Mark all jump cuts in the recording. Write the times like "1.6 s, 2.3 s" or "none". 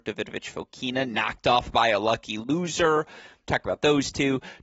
3.4 s